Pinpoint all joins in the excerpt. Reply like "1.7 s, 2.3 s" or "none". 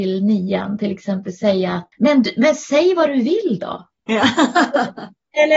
none

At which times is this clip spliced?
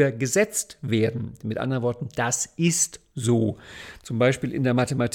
none

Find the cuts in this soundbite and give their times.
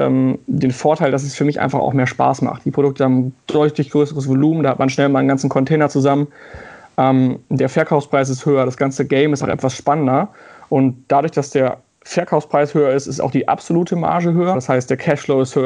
9.4 s, 14.5 s

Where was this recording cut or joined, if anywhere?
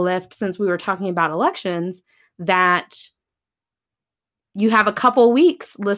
none

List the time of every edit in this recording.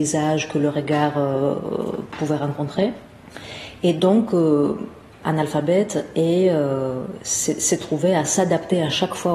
none

